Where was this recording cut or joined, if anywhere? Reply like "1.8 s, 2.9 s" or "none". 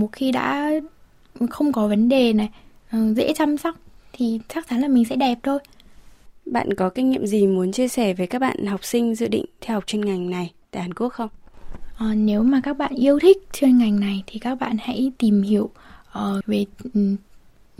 16.4 s